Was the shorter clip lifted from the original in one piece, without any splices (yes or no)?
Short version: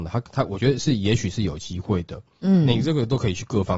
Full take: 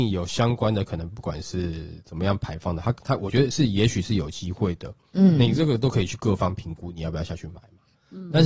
yes